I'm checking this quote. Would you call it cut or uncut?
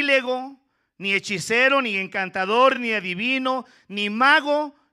uncut